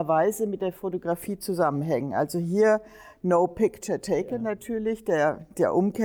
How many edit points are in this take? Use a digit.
0